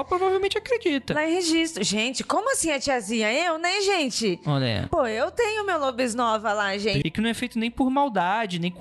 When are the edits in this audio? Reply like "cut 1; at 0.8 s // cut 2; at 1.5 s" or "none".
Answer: cut 1; at 7.0 s